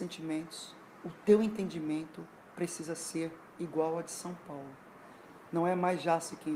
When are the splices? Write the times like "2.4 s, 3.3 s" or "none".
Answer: 1.0 s